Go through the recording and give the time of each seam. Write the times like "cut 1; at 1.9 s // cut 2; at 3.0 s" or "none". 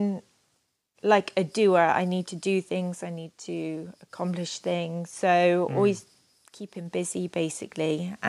none